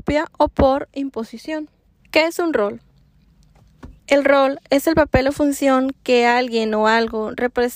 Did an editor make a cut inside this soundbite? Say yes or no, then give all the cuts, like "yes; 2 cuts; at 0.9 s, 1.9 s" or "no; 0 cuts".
yes; 2 cuts; at 2.0 s, 4.0 s